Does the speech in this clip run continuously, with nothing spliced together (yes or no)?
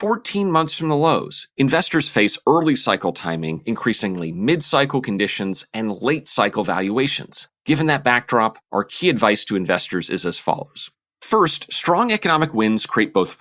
yes